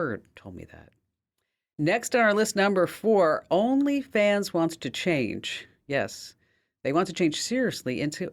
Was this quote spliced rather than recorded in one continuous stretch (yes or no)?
no